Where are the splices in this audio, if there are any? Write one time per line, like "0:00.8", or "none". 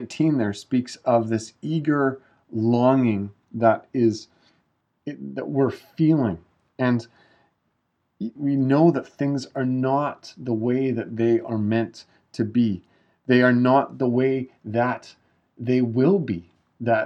0:08.4